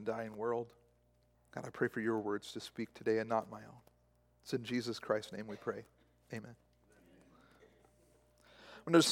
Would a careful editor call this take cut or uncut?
cut